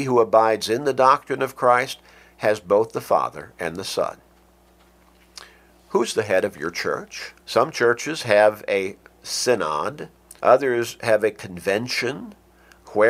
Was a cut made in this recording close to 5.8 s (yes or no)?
no